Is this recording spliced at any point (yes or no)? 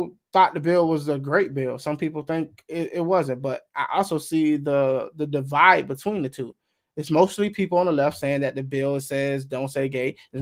no